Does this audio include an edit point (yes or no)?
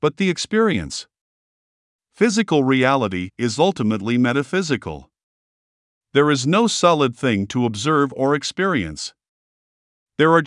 no